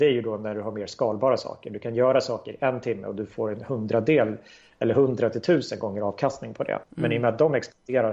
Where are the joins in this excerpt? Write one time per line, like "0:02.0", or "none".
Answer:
0:06.8